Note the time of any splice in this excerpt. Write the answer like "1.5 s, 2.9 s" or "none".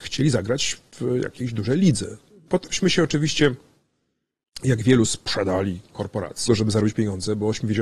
2.5 s, 6.5 s

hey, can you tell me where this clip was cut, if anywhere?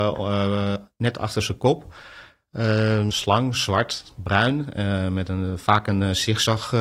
3.1 s

